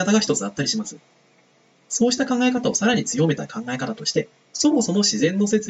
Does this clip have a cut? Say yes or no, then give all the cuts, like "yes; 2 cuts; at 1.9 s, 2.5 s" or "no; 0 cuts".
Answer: no; 0 cuts